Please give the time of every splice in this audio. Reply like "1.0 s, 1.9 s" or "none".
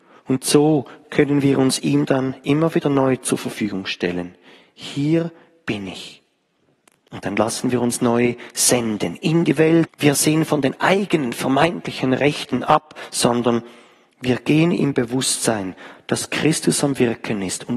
9.9 s